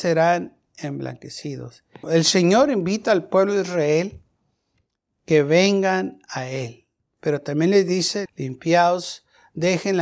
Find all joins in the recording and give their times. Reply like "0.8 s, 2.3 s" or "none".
2.0 s, 8.3 s

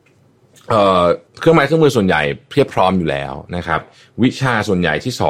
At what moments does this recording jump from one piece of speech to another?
1.3 s

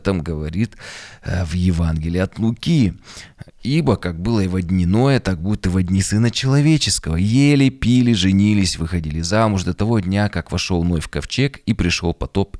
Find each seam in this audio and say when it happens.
none

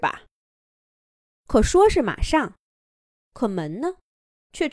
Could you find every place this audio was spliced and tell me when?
1.2 s, 3.2 s

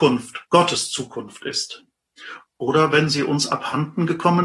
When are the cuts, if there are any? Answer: 2.4 s

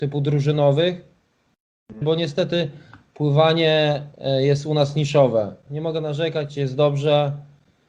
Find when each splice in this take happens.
2.0 s, 5.7 s

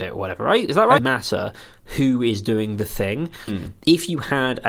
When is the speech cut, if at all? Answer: 1.0 s, 3.5 s

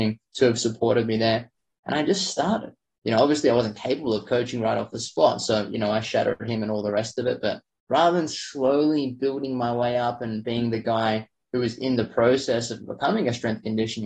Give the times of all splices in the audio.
none

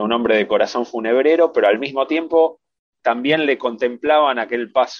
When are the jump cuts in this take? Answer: none

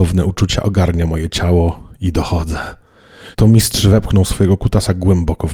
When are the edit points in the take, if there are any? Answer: 3.3 s

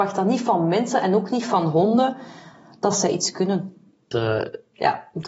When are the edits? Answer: 4.1 s

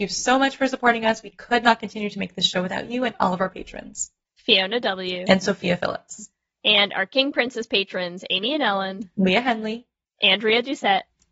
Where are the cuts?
4.4 s

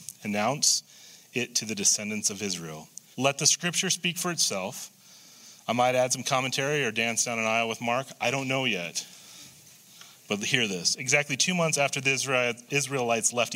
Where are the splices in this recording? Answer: 3.1 s

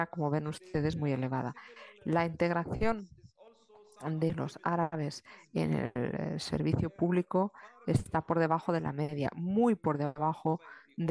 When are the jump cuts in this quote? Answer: none

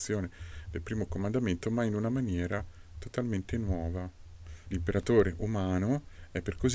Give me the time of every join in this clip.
4.7 s

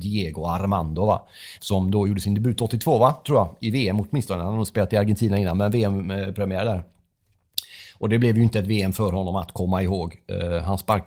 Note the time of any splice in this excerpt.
1.6 s

